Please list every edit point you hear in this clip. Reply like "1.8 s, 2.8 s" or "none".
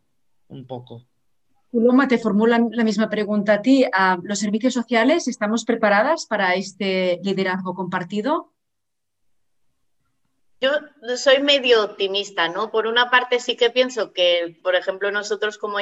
none